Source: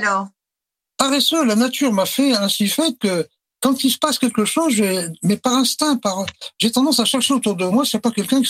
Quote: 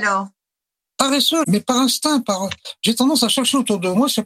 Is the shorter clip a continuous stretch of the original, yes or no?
no